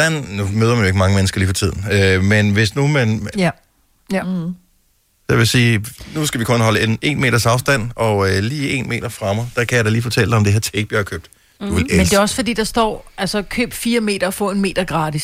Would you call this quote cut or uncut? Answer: cut